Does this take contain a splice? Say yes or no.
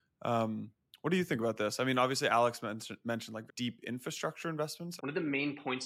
yes